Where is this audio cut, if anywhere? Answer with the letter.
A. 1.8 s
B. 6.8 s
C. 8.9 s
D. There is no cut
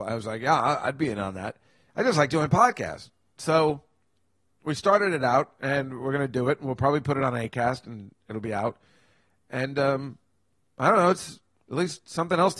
D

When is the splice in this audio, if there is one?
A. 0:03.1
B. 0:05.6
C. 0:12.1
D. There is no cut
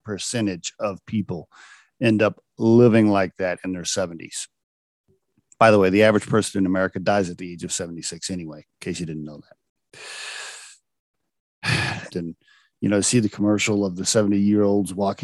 C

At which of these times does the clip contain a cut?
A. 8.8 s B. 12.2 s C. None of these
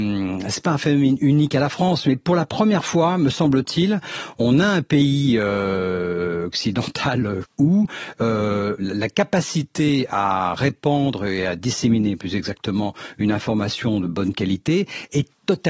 A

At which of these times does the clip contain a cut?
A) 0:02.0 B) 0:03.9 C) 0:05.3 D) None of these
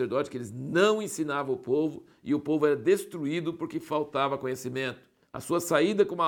C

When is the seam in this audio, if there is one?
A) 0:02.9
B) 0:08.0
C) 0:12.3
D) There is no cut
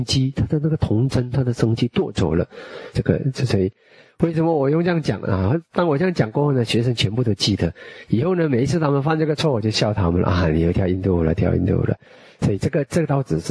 A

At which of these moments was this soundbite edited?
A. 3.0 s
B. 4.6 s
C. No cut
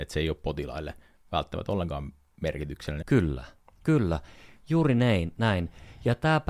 A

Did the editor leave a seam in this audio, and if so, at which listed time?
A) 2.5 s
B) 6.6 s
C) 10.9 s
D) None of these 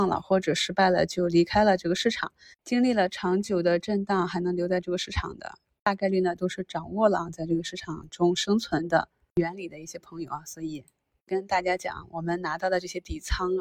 D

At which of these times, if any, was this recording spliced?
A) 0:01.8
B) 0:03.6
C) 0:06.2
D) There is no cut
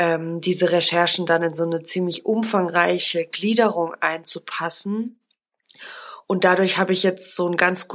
D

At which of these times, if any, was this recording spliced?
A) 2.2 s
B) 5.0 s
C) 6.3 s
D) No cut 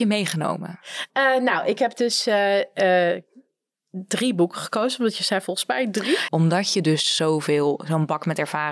C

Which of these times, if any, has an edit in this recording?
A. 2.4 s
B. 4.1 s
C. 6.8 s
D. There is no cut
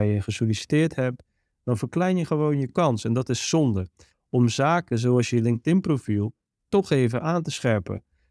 B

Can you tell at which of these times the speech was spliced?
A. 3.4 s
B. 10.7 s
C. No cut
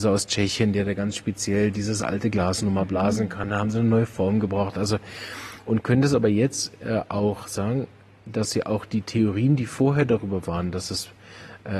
C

